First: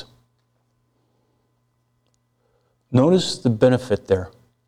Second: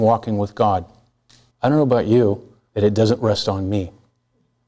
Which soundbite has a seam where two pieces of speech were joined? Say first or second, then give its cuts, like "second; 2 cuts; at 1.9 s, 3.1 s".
second; 2 cuts; at 1.5 s, 2.7 s